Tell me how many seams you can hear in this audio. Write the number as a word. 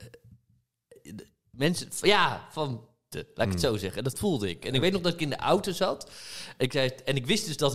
one